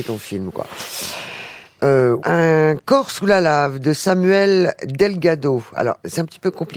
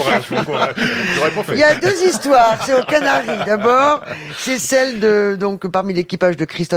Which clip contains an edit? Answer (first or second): first